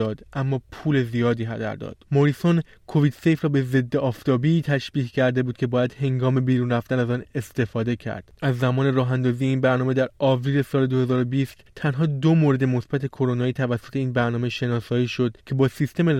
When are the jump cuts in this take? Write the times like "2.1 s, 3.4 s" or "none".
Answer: 2.0 s, 8.3 s